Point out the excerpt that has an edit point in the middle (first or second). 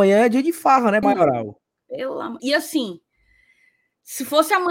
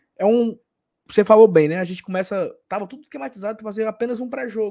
first